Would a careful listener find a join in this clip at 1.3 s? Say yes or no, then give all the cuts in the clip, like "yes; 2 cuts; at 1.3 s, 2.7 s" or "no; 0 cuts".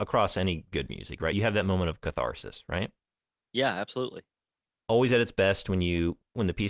no; 0 cuts